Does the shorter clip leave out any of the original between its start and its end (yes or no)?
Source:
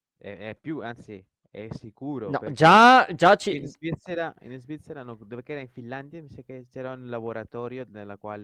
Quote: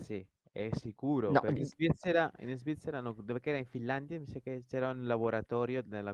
yes